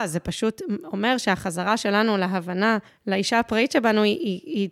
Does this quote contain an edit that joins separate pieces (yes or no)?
no